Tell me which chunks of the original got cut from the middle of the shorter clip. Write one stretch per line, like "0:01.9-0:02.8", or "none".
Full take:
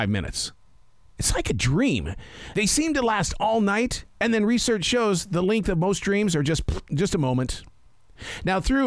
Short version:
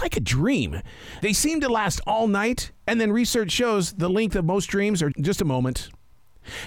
0:06.4-0:06.9